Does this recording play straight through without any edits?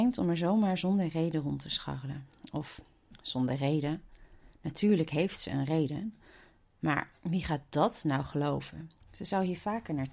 no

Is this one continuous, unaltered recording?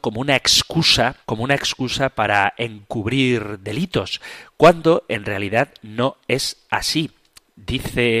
no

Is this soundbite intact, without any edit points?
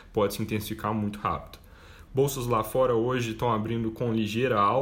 no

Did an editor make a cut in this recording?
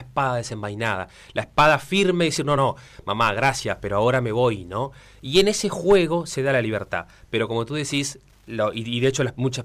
no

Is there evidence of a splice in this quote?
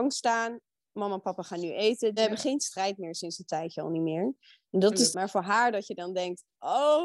yes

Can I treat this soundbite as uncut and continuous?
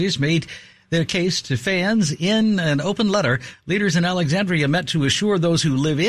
yes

